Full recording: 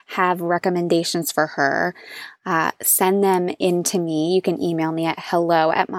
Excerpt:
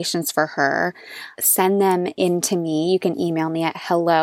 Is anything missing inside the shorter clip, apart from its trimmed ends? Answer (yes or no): yes